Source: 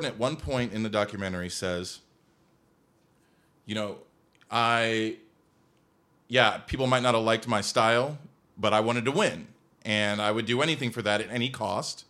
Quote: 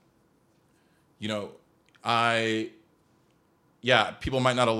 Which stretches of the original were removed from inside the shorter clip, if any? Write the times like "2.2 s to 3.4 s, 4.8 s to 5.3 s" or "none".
none